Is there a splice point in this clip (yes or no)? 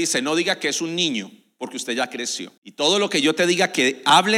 yes